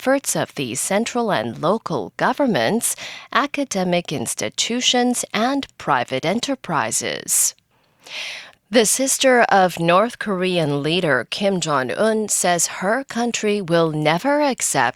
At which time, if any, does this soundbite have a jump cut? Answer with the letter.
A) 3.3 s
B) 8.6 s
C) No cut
C